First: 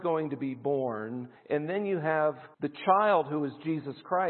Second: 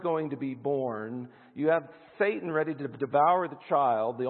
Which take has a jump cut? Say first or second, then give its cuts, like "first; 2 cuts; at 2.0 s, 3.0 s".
first; 2 cuts; at 1.4 s, 2.5 s